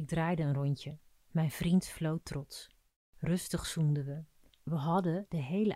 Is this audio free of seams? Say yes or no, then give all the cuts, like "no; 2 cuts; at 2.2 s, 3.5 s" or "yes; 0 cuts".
yes; 0 cuts